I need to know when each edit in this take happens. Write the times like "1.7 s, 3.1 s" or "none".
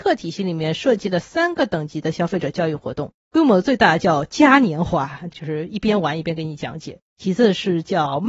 5.3 s